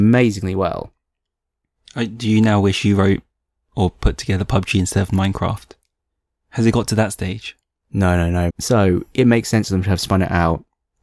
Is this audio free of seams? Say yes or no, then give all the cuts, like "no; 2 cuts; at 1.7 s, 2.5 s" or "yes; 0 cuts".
no; 1 cut; at 8.5 s